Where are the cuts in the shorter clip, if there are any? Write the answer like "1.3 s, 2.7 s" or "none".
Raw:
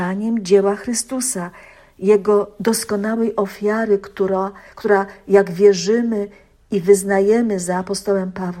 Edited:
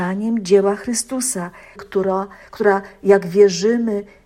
1.8 s